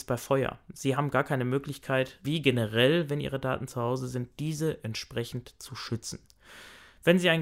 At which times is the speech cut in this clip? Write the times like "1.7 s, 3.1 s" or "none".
none